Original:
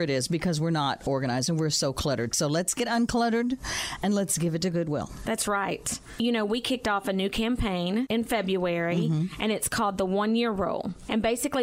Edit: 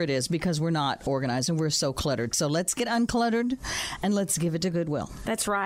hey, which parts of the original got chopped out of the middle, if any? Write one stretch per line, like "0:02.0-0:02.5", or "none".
none